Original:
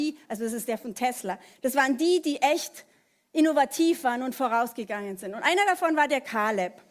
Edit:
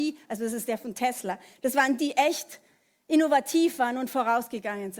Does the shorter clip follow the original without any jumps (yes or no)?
no